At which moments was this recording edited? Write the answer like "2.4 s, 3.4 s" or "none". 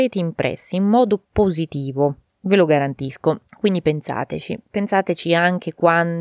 3.5 s